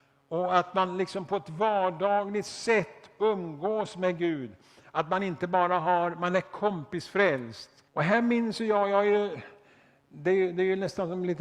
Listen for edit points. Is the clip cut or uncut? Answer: cut